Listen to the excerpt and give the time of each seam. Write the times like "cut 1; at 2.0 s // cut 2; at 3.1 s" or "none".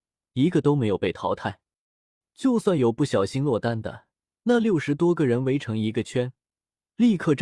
cut 1; at 2.2 s // cut 2; at 4.3 s